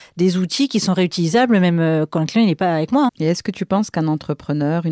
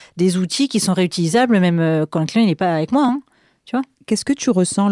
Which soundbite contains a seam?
first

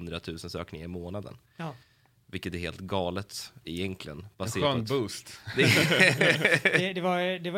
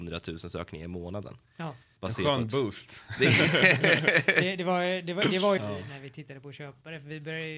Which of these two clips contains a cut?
second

